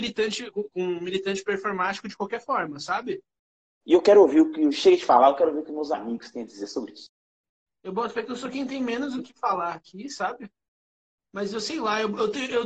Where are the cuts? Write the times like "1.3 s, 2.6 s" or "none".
3.8 s